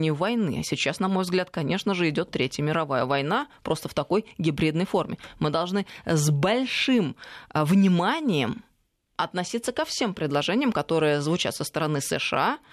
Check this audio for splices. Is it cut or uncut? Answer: uncut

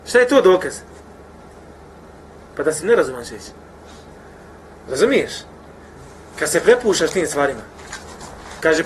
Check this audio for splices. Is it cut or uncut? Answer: uncut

